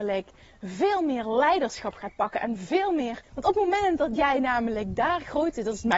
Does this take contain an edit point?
yes; 1 cut; at 3.2 s

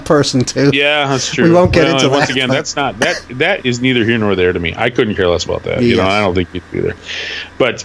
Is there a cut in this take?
no; 0 cuts

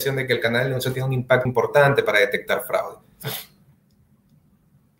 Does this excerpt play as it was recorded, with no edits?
no; 1 cut; at 1.5 s

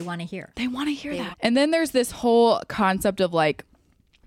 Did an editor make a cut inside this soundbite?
yes; 1 cut; at 1.3 s

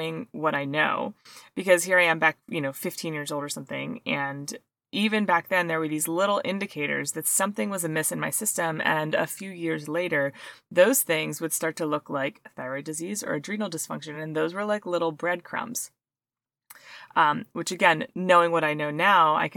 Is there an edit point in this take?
no; 0 cuts

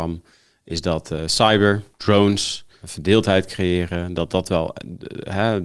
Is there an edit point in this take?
no; 0 cuts

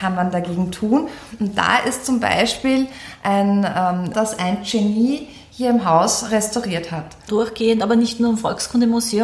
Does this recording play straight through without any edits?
no; 2 cuts; at 4.1 s, 7.3 s

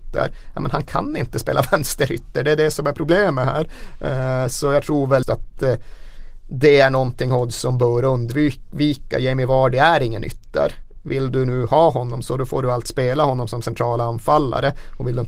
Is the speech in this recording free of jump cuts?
no; 1 cut; at 5.2 s

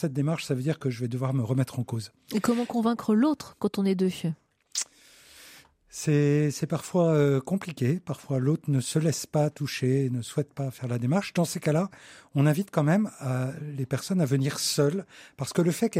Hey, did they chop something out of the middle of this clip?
no; 0 cuts

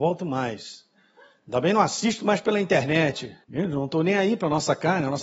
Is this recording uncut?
no; 1 cut; at 3.4 s

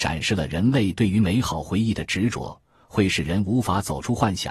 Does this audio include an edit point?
no; 0 cuts

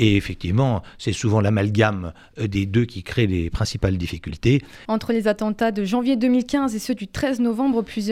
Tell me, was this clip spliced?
yes; 1 cut; at 4.8 s

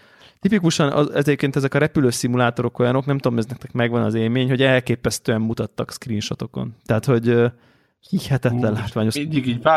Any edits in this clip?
no; 0 cuts

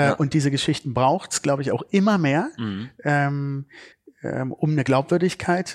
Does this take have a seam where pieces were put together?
no; 0 cuts

